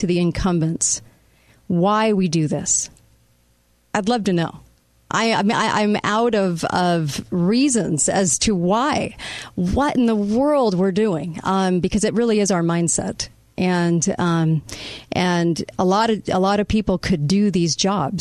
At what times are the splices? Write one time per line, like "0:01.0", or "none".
none